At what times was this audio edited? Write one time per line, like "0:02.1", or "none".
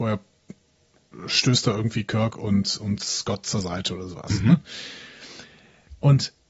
none

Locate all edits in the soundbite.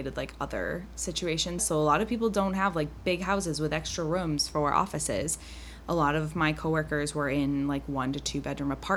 0:01.6

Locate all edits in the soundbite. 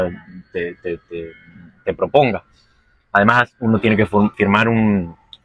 0:04.3

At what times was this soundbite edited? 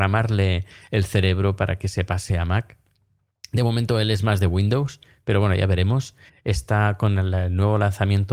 0:06.3

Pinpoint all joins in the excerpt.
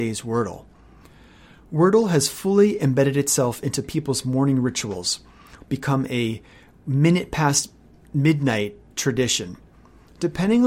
0:05.6

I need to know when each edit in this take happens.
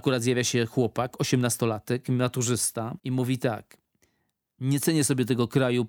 0:03.0

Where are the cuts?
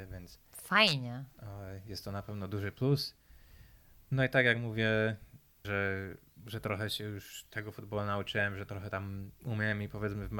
0:05.6

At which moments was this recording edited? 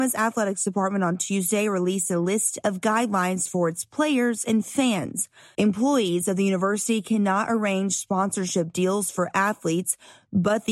0:05.5

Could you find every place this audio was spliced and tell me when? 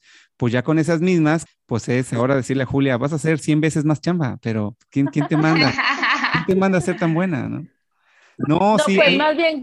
0:01.5

